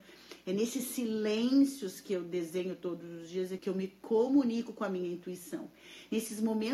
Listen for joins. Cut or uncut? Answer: cut